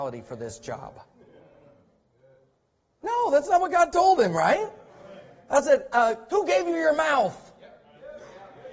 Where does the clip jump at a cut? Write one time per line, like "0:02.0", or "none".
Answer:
0:06.3